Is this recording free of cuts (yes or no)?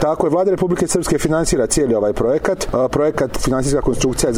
yes